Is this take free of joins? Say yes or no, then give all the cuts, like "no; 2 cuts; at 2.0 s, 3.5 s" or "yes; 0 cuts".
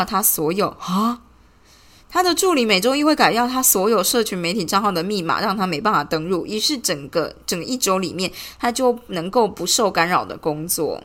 yes; 0 cuts